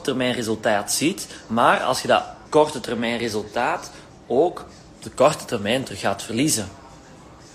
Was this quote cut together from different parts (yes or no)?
yes